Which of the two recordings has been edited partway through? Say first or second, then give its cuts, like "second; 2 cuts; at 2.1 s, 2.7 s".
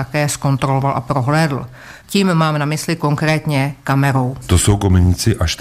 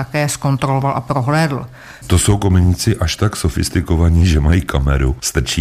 second; 1 cut; at 2.0 s